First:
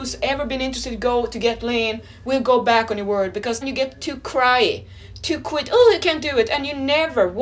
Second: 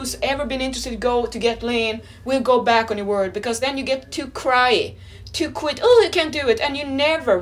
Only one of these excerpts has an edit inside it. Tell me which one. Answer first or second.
first